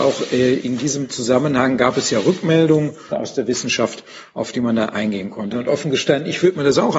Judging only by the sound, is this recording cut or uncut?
cut